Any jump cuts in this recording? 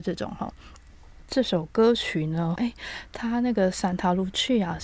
yes; 1 cut; at 2.6 s

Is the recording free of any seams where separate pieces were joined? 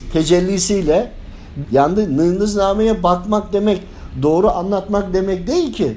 no; 1 cut; at 1.6 s

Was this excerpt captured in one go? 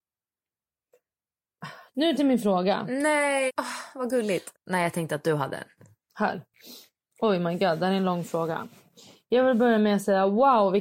no; 3 cuts; at 1.9 s, 3.5 s, 4.5 s

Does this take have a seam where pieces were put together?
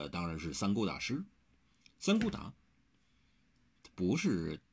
no; 0 cuts

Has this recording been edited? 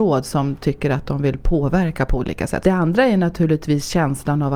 yes; 1 cut; at 2.6 s

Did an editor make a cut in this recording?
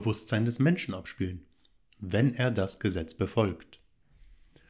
no; 0 cuts

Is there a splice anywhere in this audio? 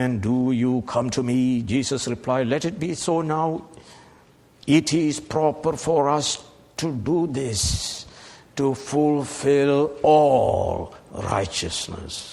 no; 0 cuts

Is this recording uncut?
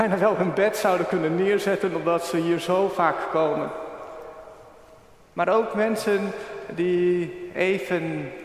yes; 0 cuts

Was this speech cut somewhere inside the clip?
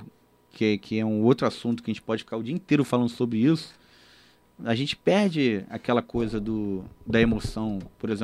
no; 0 cuts

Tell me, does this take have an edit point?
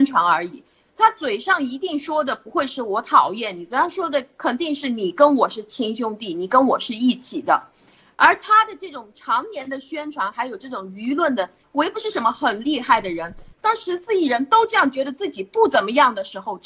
yes; 2 cuts; at 11.6 s, 13.5 s

